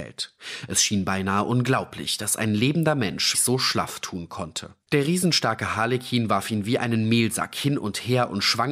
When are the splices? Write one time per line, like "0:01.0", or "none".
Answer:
0:03.3
0:04.8